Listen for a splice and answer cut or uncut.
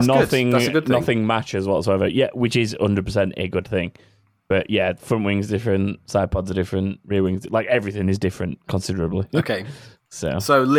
uncut